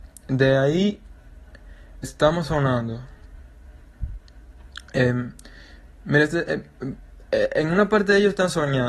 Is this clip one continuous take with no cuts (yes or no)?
no